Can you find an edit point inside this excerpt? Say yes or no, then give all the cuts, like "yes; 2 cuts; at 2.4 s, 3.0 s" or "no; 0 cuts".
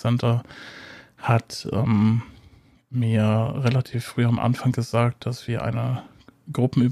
no; 0 cuts